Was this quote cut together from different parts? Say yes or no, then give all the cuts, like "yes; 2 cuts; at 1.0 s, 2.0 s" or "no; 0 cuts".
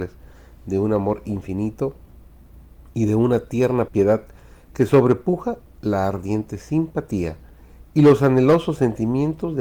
yes; 1 cut; at 3.9 s